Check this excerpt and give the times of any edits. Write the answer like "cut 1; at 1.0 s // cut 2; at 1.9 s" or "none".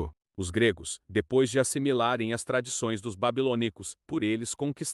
none

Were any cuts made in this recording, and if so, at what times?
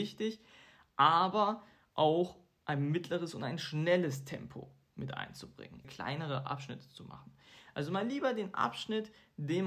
cut 1; at 5.8 s

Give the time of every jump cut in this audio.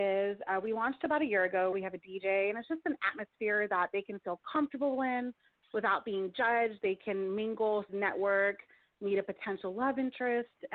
cut 1; at 1.7 s // cut 2; at 7.9 s

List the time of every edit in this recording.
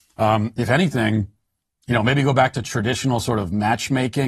none

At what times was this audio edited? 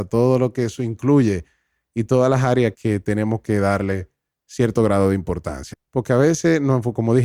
cut 1; at 2.7 s // cut 2; at 5.7 s

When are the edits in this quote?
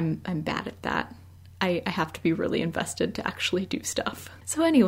none

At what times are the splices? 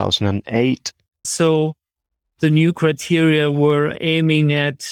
cut 1; at 1.2 s

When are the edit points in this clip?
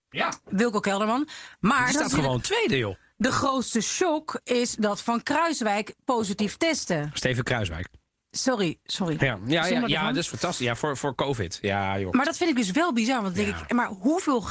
none

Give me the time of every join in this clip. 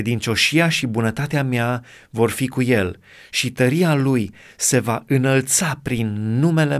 none

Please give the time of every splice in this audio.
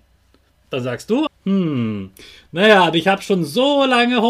cut 1; at 1.3 s

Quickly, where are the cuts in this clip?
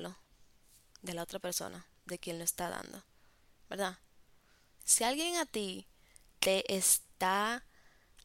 cut 1; at 4.8 s

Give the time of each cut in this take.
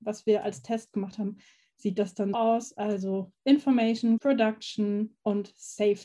cut 1; at 2.3 s // cut 2; at 4.2 s

